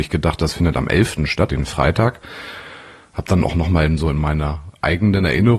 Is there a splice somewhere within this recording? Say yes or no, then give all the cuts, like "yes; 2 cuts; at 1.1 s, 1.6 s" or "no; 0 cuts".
yes; 1 cut; at 1.5 s